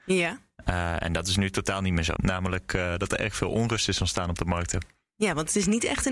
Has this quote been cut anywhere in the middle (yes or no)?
yes